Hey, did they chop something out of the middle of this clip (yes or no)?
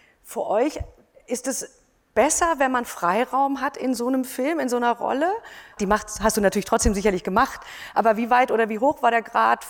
yes